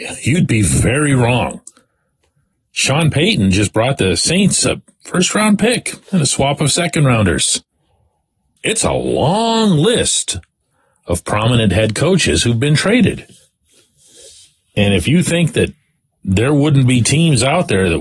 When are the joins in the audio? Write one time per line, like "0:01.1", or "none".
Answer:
0:08.6